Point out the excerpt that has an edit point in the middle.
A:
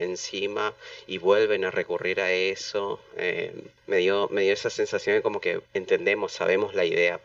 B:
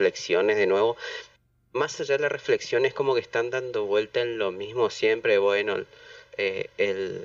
A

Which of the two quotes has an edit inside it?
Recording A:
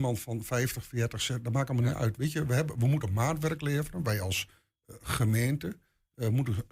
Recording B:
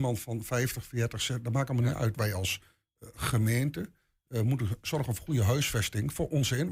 B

